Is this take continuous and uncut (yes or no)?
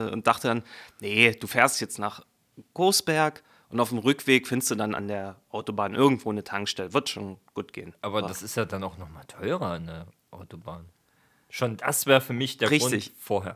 yes